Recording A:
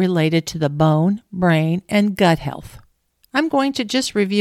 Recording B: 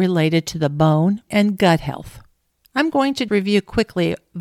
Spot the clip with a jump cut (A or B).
B